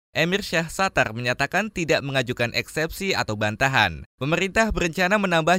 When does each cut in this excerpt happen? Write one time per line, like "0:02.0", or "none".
0:04.1